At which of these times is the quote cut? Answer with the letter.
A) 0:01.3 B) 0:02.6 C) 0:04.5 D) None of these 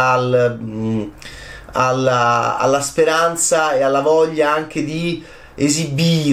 B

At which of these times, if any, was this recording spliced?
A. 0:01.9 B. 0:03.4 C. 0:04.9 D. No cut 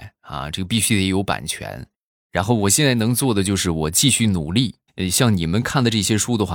C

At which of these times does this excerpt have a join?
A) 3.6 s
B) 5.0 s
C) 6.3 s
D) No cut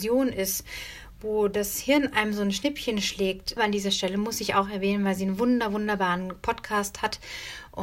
A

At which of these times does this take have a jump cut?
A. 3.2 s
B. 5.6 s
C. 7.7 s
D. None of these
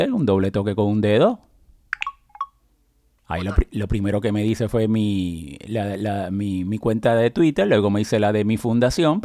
A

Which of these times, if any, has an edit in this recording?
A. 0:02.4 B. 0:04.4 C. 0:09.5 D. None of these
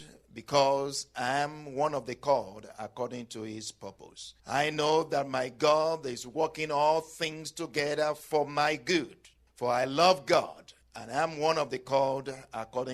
B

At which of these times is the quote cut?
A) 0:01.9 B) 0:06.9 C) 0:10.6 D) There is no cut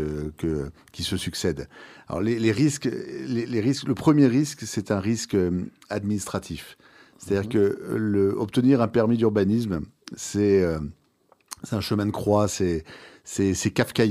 D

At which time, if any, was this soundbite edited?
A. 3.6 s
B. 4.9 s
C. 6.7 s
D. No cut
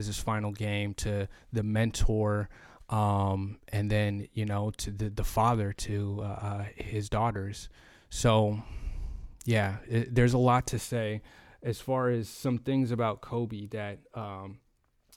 D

